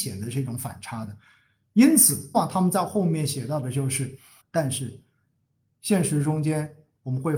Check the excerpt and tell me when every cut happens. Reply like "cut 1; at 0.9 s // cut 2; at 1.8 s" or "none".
cut 1; at 2.3 s // cut 2; at 4.4 s